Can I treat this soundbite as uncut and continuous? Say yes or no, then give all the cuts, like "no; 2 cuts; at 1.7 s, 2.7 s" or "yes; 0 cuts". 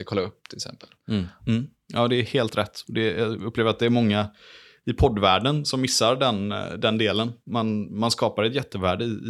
no; 1 cut; at 1.4 s